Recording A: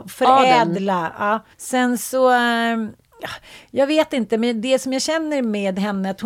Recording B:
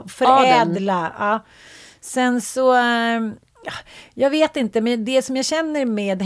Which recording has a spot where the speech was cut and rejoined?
A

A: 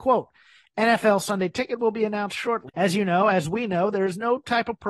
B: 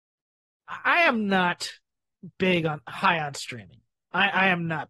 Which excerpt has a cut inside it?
A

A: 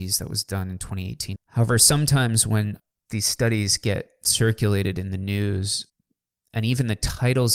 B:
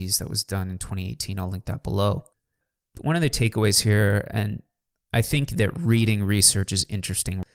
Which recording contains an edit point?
A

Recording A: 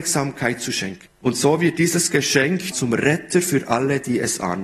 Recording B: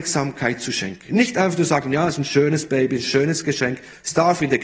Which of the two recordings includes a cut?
A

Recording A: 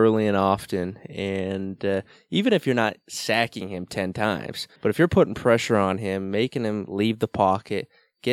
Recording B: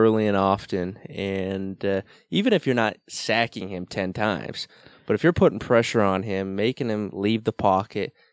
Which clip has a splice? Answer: A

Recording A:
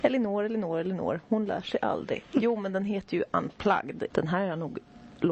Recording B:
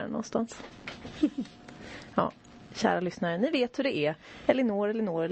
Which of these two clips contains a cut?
A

